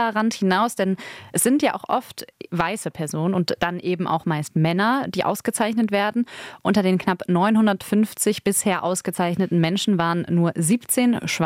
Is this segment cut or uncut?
uncut